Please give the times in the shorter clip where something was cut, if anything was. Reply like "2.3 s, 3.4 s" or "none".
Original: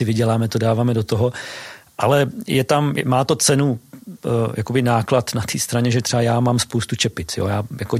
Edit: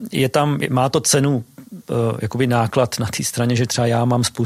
none